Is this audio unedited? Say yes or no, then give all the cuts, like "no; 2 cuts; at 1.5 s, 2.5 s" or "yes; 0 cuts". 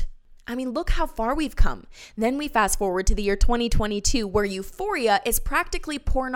no; 1 cut; at 2.1 s